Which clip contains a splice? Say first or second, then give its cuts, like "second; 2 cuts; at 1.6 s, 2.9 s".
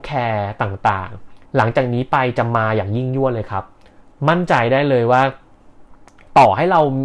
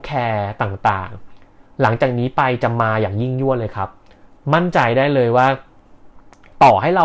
first; 1 cut; at 1.5 s